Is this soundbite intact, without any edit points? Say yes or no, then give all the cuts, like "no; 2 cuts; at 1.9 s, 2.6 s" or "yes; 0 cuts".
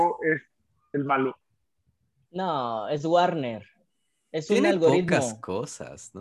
yes; 0 cuts